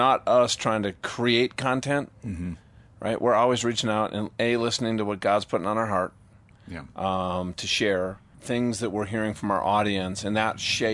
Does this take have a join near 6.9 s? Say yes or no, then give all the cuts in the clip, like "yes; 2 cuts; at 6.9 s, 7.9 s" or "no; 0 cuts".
no; 1 cut; at 8.3 s